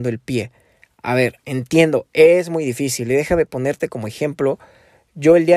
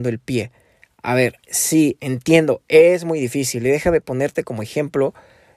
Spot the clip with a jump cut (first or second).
first